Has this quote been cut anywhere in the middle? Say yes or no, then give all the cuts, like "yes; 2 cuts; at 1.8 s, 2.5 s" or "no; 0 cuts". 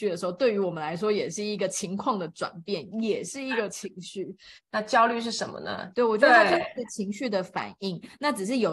yes; 2 cuts; at 4.6 s, 5.9 s